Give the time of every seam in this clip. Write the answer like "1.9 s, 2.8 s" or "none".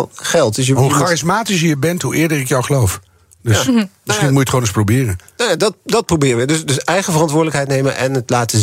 none